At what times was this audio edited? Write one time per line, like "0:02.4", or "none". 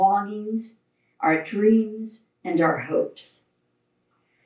none

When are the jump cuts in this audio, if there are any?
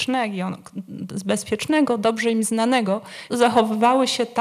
0:03.3

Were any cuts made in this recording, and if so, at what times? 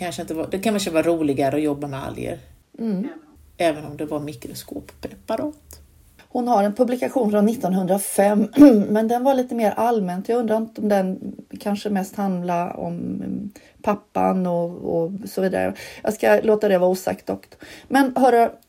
none

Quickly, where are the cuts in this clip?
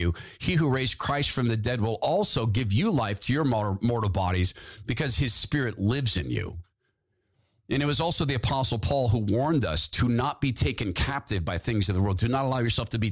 none

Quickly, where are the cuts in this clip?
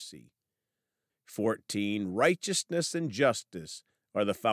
0:01.1

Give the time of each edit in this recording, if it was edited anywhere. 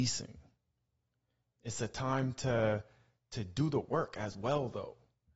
0:01.5

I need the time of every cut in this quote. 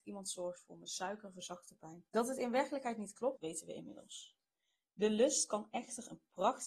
0:02.1
0:03.4

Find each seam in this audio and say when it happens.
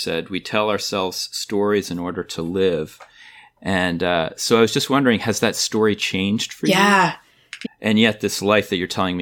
0:07.6

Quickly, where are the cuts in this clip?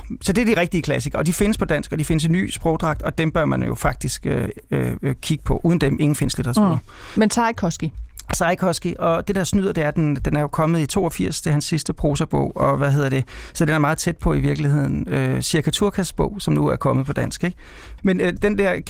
0:18.0

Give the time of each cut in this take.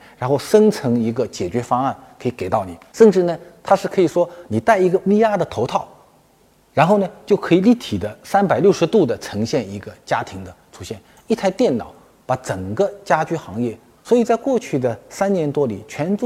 0:14.0

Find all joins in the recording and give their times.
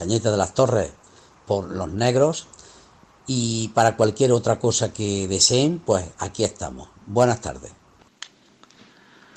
none

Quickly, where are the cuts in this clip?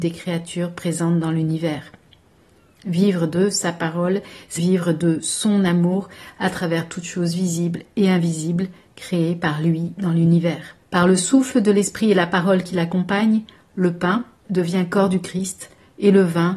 0:04.6
0:10.8
0:14.4

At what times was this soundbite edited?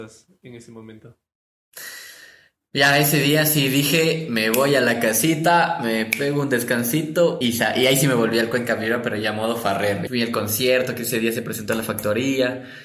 0:07.4
0:10.1

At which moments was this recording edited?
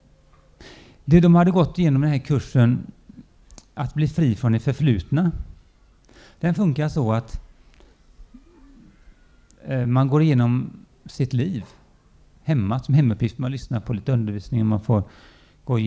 none

